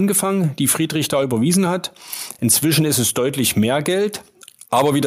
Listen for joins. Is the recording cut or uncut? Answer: uncut